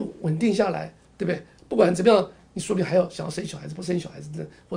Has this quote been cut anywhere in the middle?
no; 0 cuts

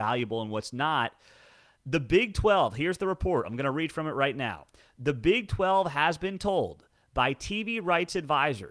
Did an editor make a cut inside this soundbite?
no; 0 cuts

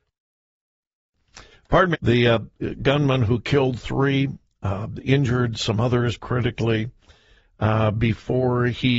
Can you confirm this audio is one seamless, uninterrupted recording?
no; 2 cuts; at 1.9 s, 6.2 s

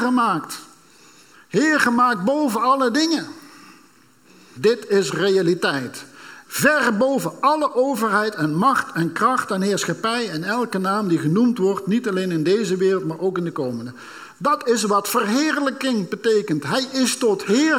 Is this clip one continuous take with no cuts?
no; 2 cuts; at 4.6 s, 6.4 s

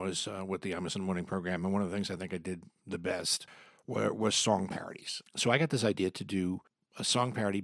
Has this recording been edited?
yes; 1 cut; at 5.2 s

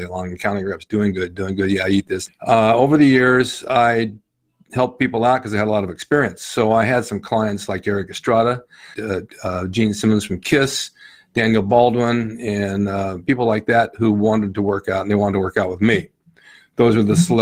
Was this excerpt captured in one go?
no; 2 cuts; at 2.3 s, 8.9 s

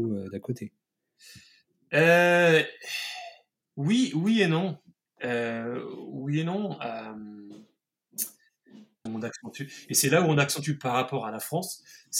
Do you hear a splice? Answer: yes; 1 cut; at 9.1 s

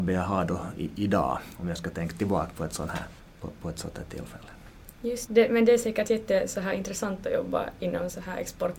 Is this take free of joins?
no; 3 cuts; at 1.6 s, 3.2 s, 5.3 s

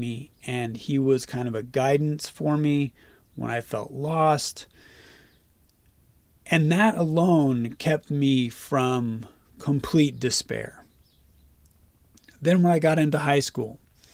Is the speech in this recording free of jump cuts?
yes; 0 cuts

